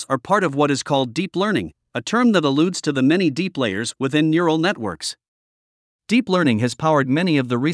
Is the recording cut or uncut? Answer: uncut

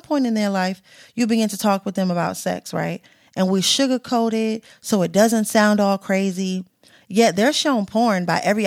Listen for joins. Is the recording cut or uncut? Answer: uncut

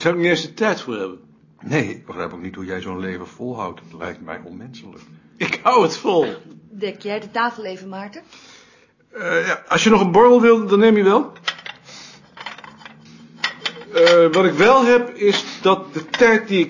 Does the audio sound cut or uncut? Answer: uncut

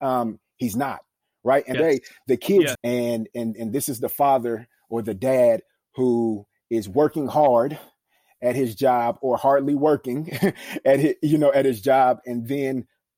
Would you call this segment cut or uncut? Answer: cut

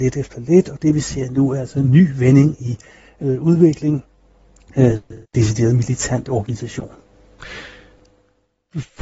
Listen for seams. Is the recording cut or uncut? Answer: cut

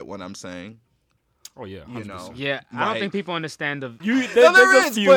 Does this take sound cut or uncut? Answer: cut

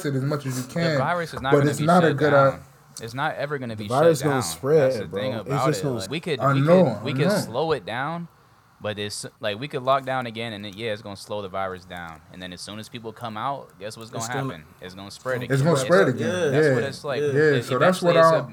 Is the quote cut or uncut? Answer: cut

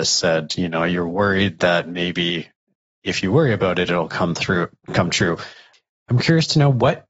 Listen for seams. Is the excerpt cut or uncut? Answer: uncut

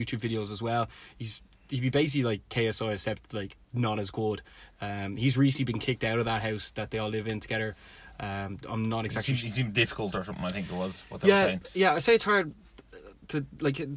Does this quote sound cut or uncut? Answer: cut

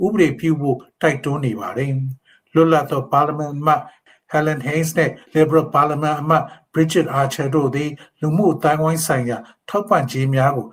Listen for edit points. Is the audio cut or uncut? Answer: cut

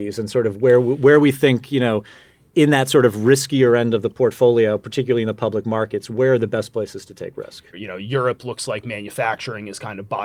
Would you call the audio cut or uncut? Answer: cut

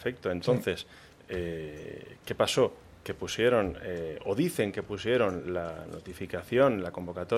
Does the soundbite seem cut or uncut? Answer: uncut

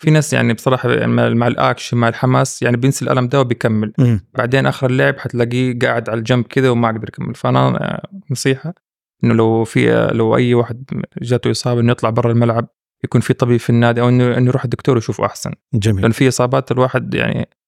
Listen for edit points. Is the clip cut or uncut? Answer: uncut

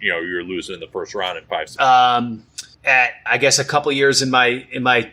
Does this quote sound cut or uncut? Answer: cut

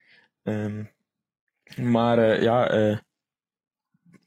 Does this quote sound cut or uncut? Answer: uncut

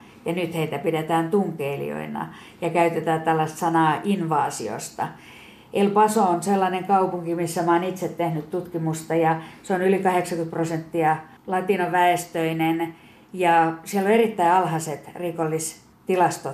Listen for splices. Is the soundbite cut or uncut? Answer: uncut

